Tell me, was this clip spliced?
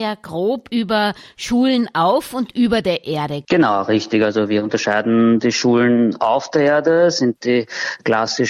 yes; 1 cut; at 3.4 s

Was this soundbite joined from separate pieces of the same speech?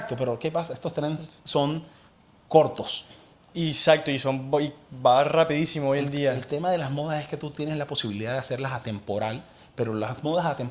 no; 0 cuts

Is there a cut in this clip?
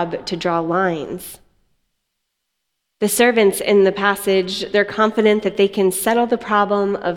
no; 0 cuts

